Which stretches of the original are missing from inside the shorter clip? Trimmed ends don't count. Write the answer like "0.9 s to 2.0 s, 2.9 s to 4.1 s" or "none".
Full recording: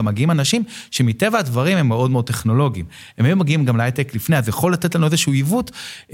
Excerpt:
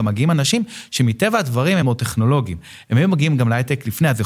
1.8 s to 2.1 s

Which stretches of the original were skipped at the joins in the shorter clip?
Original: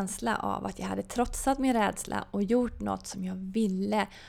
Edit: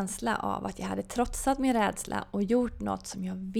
none

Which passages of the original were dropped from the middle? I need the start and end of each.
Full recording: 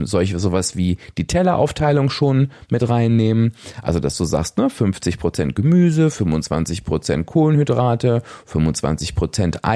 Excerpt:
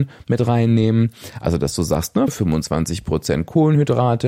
4.7 s to 6.1 s

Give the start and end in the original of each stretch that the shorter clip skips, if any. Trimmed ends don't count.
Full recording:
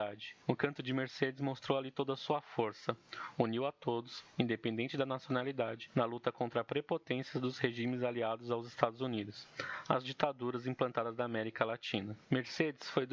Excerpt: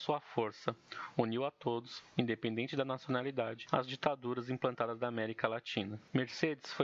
5.9 s to 9.8 s

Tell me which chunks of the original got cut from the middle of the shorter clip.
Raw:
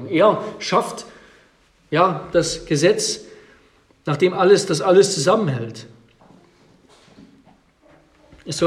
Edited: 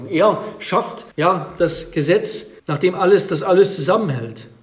1.1 s to 1.9 s, 3.3 s to 4.0 s

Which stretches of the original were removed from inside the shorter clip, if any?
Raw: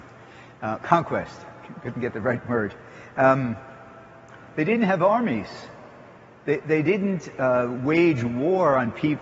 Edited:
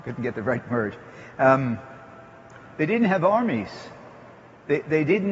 none

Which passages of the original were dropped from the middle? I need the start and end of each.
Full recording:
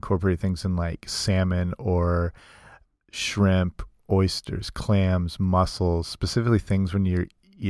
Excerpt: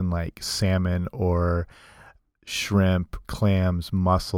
3.9 s to 4.7 s

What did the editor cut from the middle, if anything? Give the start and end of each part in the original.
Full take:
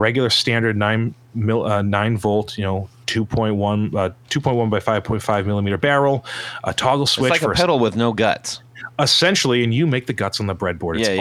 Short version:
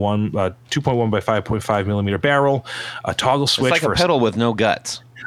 none

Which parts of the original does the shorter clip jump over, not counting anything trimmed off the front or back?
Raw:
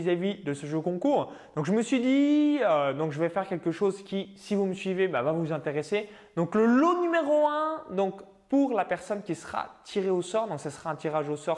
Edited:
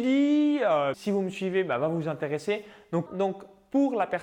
2.9 s to 4.4 s, 6.5 s to 7.8 s

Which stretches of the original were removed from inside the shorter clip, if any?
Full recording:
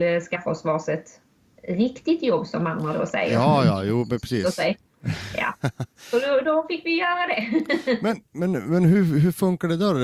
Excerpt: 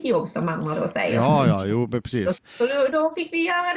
4.6 s to 5.9 s

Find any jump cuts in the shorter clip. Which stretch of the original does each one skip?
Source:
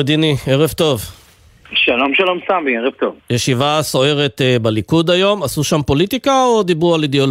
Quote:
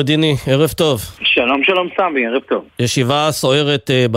1.2 s to 1.7 s

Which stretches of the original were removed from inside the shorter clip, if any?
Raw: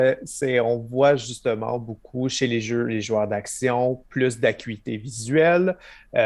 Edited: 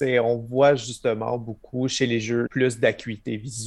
2.9 s to 4.1 s

